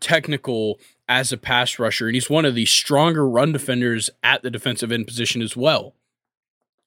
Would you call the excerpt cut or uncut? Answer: uncut